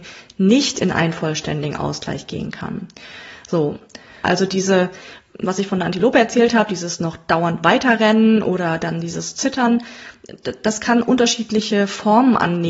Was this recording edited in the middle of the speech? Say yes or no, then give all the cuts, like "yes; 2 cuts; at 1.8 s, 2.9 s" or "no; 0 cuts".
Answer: yes; 1 cut; at 4.2 s